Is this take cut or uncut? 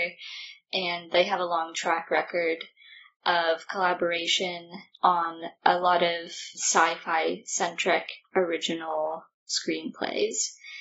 cut